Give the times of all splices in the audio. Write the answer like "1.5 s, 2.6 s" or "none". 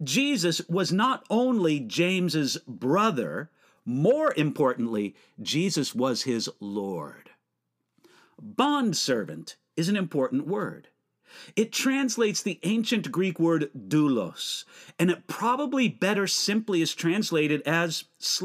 none